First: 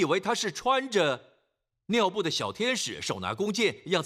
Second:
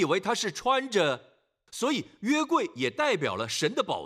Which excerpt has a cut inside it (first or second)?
second